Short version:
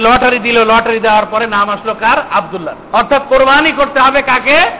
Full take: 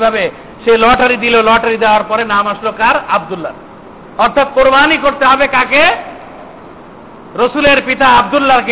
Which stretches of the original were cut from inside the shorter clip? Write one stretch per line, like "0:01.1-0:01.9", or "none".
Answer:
0:03.7-0:04.1